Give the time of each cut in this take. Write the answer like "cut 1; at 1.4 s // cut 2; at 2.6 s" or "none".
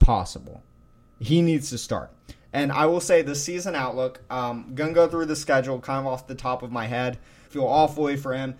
cut 1; at 7.5 s